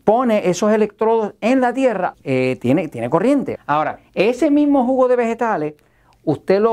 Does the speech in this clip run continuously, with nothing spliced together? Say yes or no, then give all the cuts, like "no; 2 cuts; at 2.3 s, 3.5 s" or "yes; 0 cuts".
no; 2 cuts; at 2.1 s, 3.5 s